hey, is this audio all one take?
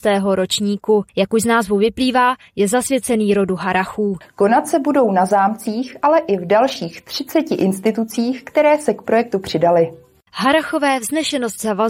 no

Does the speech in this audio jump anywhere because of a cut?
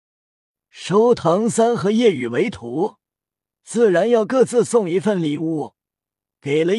no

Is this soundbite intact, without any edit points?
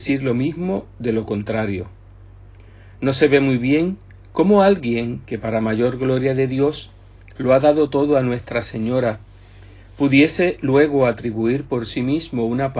yes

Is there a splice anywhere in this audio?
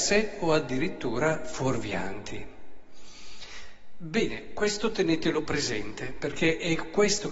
no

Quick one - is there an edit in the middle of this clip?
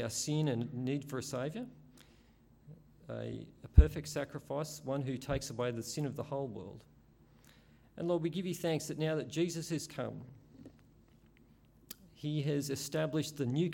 no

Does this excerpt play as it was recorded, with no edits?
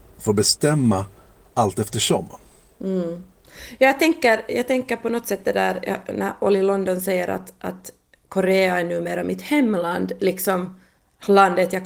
yes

